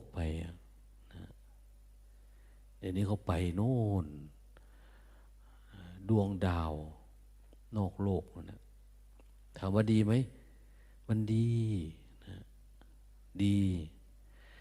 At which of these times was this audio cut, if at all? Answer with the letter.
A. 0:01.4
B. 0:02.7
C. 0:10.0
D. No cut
D